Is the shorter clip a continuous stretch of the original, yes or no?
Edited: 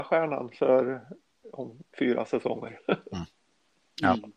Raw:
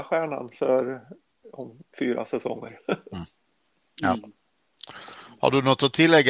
yes